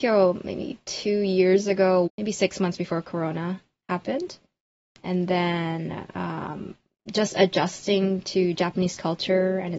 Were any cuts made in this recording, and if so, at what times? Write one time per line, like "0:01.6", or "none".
0:02.1